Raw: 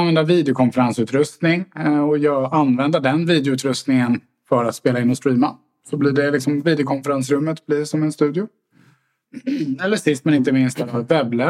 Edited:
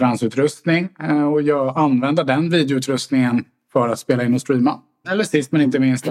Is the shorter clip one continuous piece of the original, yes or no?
no